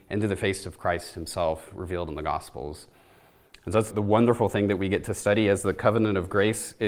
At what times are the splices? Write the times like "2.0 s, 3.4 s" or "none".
3.9 s